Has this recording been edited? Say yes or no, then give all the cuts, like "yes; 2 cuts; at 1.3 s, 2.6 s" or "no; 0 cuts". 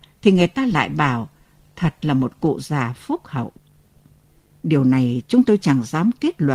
yes; 1 cut; at 4.5 s